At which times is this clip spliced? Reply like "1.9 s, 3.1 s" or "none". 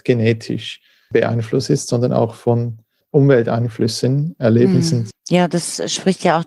5.1 s